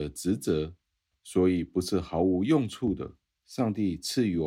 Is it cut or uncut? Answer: cut